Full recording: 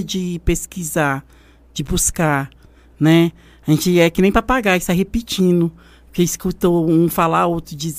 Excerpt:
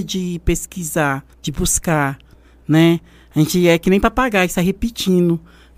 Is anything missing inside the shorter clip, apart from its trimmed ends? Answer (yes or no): yes